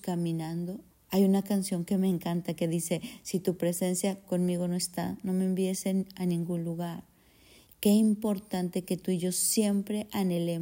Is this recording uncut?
no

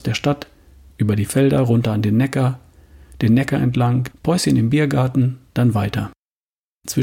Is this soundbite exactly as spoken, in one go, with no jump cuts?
no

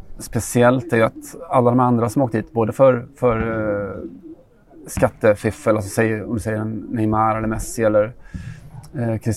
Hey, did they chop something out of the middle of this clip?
no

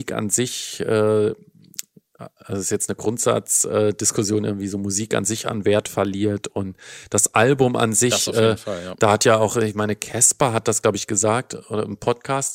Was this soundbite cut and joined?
no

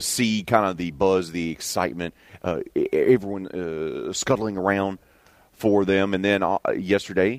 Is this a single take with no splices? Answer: yes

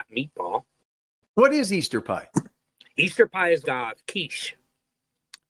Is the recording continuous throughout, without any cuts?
no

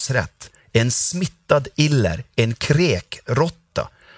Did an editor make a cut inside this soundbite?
no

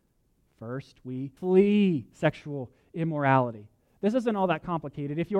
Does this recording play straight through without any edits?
no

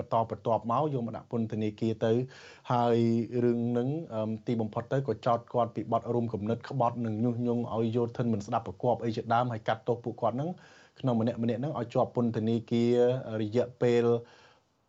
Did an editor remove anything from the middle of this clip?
no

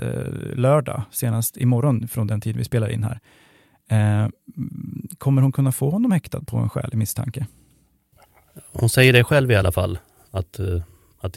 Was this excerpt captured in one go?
yes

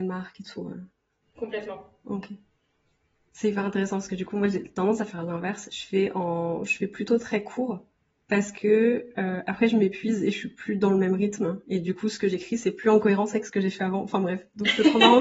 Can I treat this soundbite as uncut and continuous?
yes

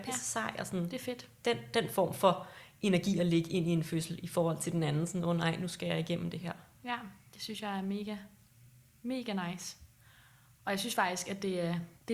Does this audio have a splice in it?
no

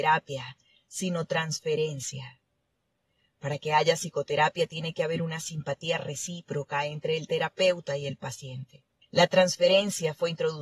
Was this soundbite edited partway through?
yes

